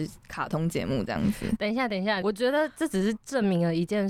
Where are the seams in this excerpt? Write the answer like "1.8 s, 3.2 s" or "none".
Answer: 2.2 s